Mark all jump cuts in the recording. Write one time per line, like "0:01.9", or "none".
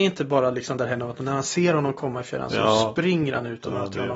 none